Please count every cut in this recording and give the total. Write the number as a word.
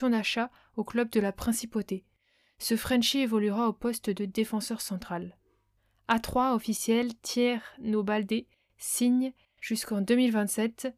zero